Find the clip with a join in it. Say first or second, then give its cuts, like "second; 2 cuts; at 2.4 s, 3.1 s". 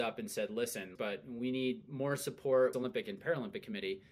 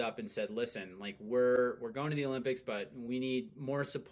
first; 2 cuts; at 1.0 s, 2.7 s